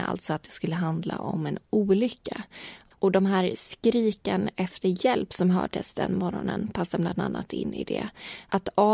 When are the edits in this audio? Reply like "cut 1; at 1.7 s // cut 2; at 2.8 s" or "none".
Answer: cut 1; at 2.9 s